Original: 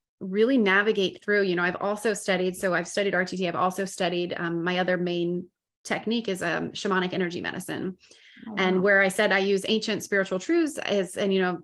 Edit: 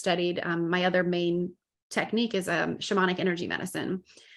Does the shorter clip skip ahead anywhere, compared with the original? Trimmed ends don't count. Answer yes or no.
no